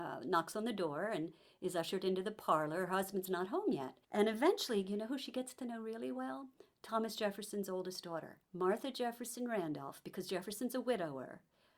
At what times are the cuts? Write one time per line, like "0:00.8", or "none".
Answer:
0:04.0
0:08.4